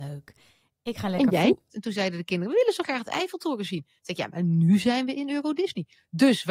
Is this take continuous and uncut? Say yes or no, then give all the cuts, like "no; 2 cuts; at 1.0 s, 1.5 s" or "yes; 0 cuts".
no; 1 cut; at 1.7 s